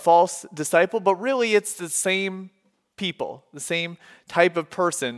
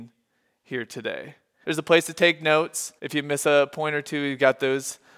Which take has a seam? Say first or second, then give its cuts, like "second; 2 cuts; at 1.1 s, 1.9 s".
second; 2 cuts; at 1.6 s, 3.0 s